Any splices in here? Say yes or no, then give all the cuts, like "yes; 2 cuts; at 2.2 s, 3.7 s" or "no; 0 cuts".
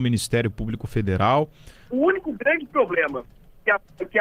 yes; 1 cut; at 1.9 s